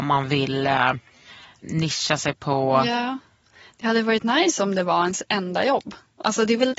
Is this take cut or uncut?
uncut